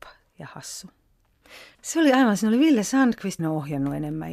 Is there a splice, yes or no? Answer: yes